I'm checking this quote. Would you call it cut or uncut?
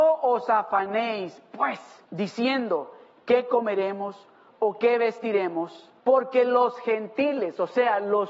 cut